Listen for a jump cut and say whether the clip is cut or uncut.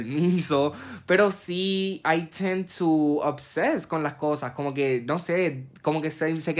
uncut